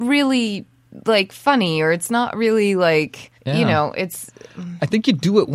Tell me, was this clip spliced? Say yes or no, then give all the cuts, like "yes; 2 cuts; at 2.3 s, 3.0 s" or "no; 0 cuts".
yes; 1 cut; at 3.4 s